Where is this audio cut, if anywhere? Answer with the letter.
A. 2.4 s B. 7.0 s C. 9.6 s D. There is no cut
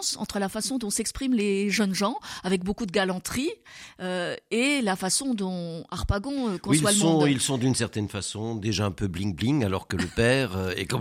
D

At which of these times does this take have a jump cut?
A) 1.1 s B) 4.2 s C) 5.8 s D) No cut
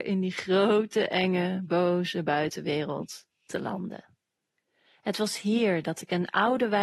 D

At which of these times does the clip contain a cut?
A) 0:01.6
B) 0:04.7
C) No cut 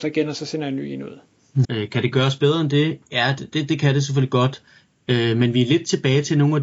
A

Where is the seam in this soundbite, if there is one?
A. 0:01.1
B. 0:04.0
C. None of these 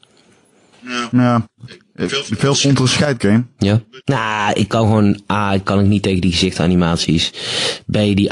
B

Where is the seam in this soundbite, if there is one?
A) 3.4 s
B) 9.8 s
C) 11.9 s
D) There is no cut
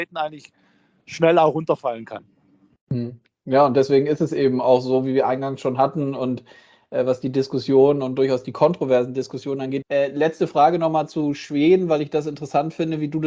B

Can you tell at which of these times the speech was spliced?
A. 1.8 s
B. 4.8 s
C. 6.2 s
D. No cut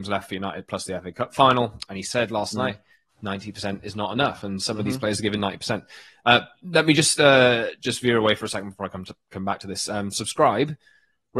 A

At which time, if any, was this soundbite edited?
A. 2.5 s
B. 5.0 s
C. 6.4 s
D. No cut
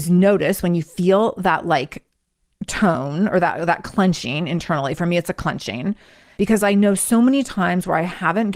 C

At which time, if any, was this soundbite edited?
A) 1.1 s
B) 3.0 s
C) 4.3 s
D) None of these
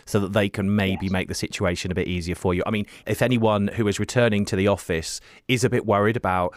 B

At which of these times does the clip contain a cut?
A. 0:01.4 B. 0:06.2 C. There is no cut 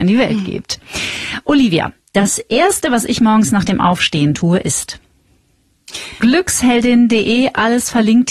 B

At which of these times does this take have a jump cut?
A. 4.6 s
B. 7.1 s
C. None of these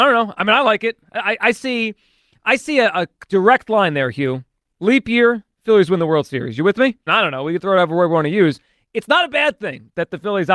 B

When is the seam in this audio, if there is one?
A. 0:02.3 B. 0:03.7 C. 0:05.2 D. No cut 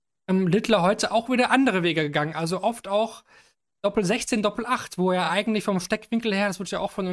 D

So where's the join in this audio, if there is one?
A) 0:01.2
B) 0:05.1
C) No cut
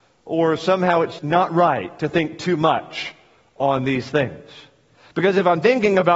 A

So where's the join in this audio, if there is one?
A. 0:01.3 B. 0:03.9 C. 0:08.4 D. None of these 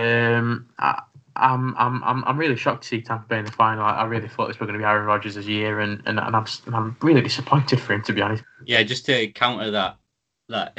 C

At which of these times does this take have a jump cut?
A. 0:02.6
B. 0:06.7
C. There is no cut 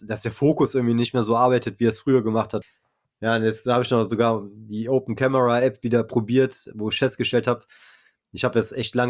A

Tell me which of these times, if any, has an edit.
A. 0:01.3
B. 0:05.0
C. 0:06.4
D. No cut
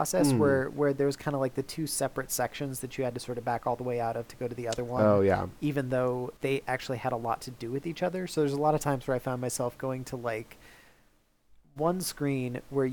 C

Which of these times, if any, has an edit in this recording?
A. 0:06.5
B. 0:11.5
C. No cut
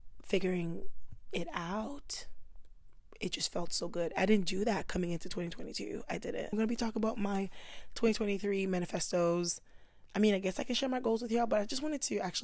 A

